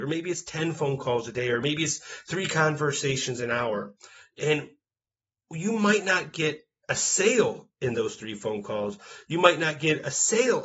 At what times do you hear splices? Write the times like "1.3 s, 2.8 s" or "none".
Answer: none